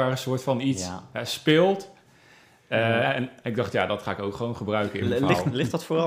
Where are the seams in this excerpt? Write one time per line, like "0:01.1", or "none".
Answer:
none